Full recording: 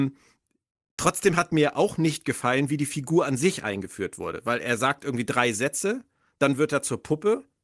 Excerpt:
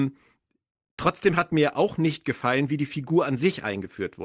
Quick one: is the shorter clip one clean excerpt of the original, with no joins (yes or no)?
yes